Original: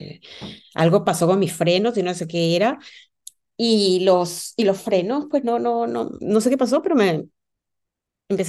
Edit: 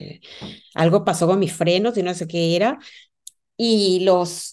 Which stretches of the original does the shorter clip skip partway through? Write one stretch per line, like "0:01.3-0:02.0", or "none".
none